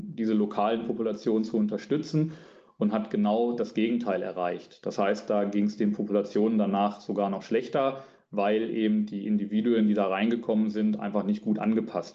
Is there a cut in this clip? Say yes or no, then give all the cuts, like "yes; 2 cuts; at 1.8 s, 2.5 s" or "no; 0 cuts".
no; 0 cuts